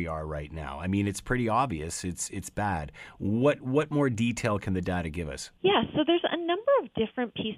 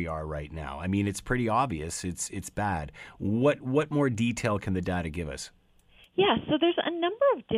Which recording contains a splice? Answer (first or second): first